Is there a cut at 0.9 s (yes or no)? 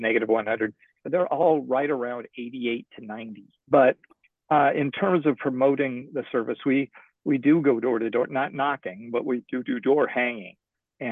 no